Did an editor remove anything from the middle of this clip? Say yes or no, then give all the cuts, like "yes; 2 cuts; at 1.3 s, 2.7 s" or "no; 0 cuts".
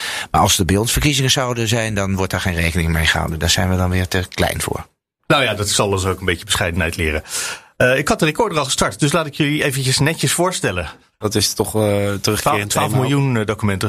yes; 1 cut; at 11.2 s